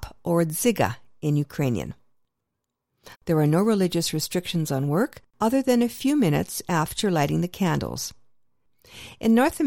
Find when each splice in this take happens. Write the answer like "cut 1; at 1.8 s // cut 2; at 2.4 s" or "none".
cut 1; at 3.1 s // cut 2; at 5.3 s